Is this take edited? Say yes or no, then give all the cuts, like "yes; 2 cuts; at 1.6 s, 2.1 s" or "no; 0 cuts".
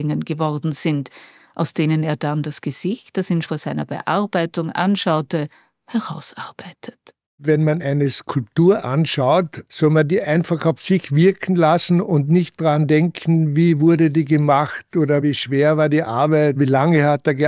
yes; 1 cut; at 3.4 s